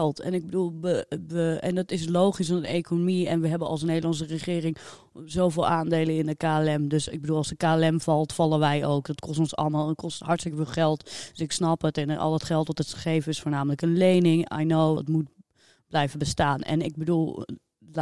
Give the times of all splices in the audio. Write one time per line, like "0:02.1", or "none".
0:15.0

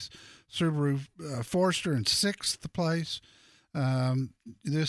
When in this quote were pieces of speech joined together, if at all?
none

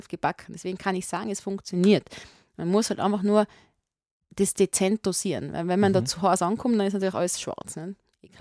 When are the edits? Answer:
none

